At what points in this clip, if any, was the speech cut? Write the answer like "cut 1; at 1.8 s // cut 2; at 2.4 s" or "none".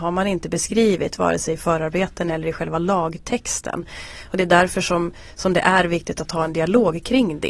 none